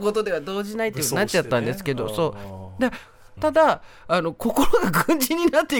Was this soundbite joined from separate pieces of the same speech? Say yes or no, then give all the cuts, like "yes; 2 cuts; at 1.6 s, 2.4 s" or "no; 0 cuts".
yes; 1 cut; at 3.4 s